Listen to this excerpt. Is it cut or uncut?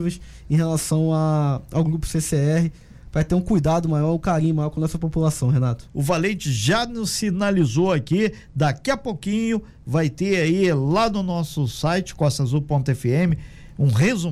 cut